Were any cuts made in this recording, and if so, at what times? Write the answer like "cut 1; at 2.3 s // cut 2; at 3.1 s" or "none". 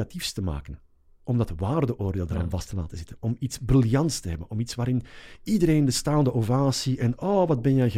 none